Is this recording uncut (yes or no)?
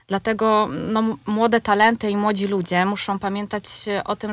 yes